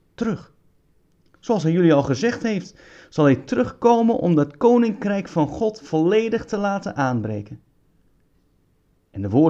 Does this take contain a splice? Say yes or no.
no